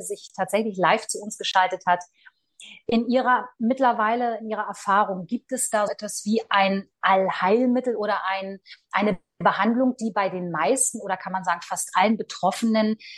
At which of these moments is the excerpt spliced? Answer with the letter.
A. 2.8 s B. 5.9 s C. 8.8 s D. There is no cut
B